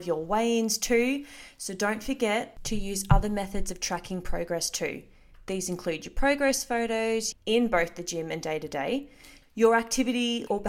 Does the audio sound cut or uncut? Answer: cut